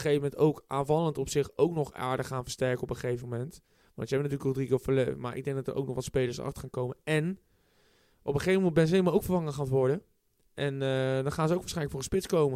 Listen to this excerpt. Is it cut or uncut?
uncut